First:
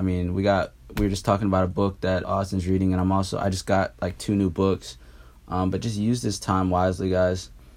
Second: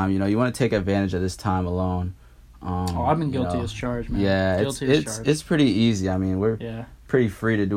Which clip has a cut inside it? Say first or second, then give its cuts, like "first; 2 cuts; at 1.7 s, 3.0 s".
first; 1 cut; at 2.2 s